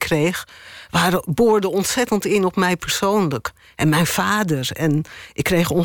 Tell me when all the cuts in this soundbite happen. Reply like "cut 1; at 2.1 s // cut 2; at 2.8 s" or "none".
none